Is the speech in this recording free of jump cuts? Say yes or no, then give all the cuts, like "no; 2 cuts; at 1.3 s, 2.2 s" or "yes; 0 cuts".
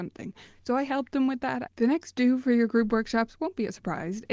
no; 1 cut; at 1.7 s